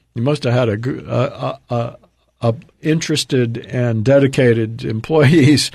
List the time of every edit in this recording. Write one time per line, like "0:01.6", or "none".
0:02.7

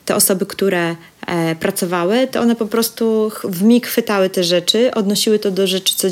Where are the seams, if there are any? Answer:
none

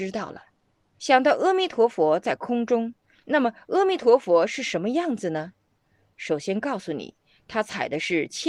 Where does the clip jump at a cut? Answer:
0:01.0

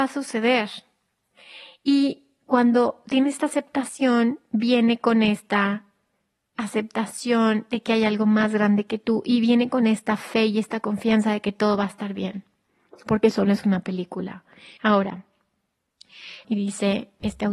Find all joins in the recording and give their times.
0:14.8
0:16.4

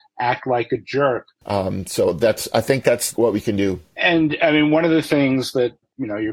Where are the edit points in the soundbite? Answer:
0:01.4
0:03.9

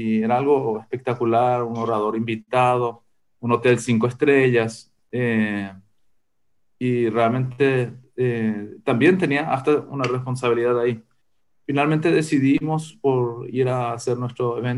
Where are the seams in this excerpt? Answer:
none

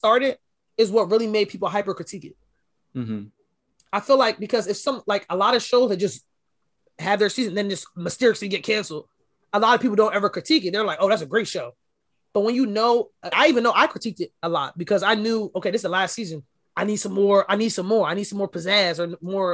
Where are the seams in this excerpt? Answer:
0:13.3

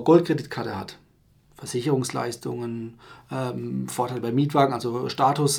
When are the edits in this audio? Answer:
none

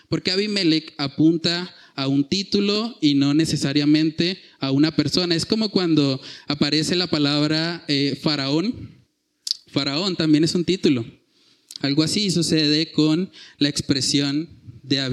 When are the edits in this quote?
0:11.8

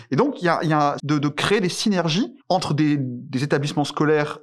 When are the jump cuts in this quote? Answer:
0:01.0
0:02.4

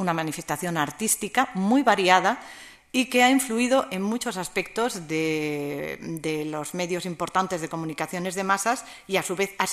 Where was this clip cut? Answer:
none

